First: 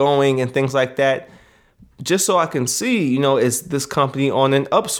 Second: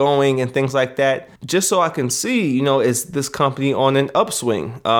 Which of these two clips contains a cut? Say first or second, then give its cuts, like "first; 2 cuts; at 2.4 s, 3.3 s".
second; 1 cut; at 1.4 s